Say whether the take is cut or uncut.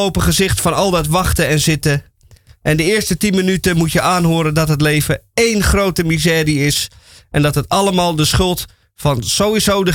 uncut